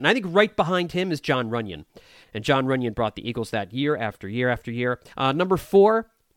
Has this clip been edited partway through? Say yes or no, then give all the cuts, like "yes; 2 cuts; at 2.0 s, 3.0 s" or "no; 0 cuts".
yes; 2 cuts; at 2.2 s, 5.1 s